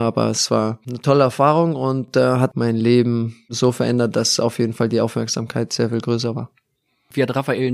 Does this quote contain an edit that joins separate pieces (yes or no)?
no